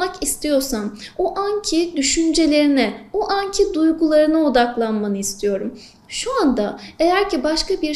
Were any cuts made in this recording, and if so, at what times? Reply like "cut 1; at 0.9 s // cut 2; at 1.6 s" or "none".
cut 1; at 6.0 s